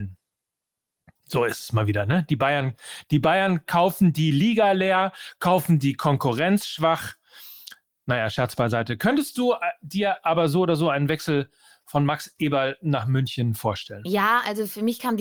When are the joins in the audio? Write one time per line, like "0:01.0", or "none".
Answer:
none

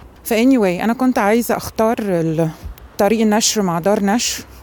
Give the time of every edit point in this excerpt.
0:02.9

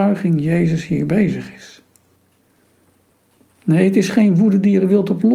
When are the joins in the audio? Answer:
none

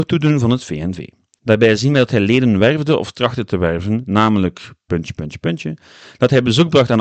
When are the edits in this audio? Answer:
0:01.4

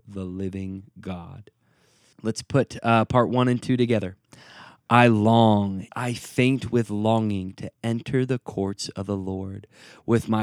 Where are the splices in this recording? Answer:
0:02.1
0:05.9

